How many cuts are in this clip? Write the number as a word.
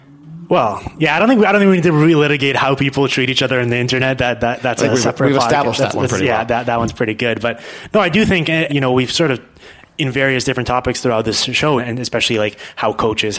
two